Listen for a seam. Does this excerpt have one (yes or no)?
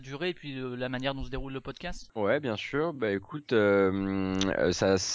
no